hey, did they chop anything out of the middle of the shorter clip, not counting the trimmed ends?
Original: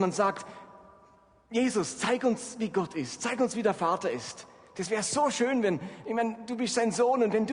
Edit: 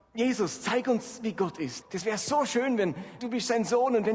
yes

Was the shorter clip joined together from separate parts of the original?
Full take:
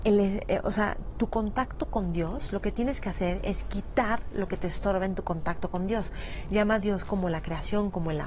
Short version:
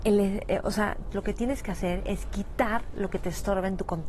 yes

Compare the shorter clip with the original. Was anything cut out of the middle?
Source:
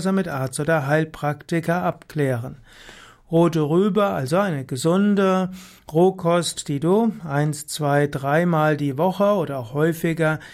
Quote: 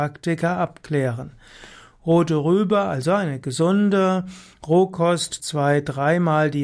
yes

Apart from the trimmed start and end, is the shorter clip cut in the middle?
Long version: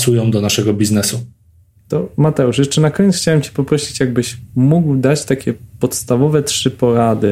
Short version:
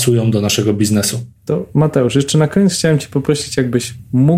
yes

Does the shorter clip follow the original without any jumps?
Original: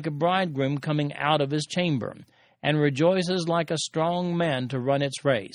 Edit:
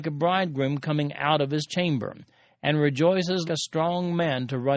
no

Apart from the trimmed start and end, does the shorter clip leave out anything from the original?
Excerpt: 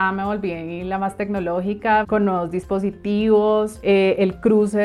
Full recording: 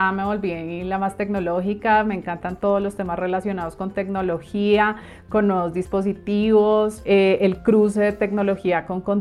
yes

